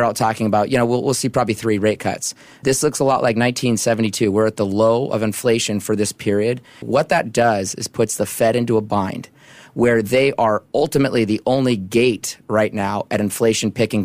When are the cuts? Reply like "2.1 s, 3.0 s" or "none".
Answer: 6.8 s